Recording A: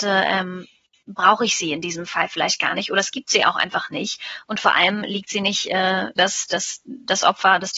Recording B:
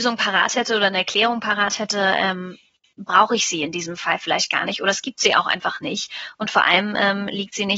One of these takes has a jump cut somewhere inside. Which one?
A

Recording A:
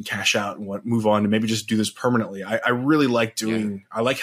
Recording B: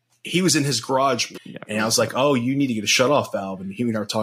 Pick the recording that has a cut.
B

